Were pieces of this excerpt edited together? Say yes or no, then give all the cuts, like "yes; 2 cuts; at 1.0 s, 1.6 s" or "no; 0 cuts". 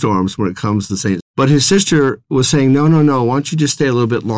yes; 1 cut; at 1.2 s